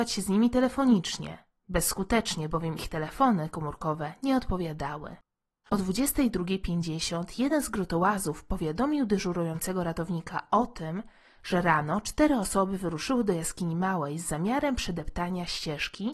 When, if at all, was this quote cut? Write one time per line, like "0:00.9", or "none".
none